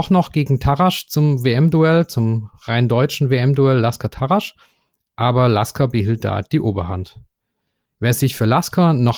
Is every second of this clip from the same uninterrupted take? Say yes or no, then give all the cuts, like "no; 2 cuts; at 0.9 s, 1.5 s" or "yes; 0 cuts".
no; 1 cut; at 7.9 s